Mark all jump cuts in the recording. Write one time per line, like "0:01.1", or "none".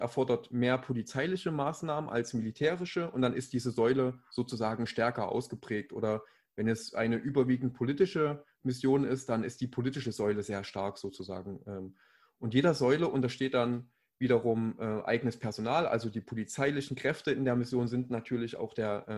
none